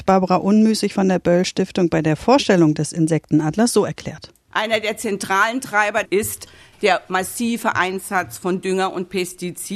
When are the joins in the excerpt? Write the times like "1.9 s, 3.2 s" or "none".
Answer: 6.0 s